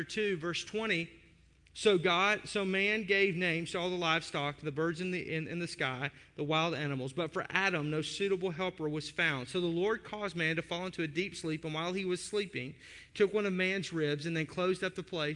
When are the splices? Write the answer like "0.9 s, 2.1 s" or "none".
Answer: none